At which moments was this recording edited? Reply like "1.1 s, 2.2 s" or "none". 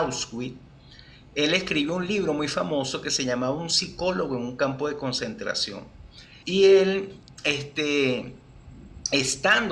6.4 s